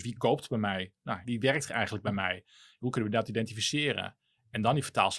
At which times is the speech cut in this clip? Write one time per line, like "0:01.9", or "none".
0:01.2